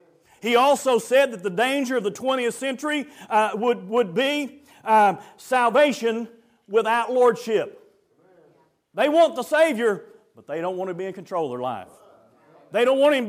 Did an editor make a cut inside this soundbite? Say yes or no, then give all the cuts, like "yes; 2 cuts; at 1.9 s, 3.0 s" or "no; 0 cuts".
no; 0 cuts